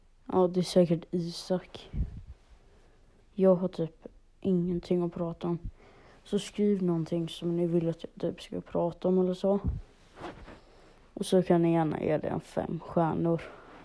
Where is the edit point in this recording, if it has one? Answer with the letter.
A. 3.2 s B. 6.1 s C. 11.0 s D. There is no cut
A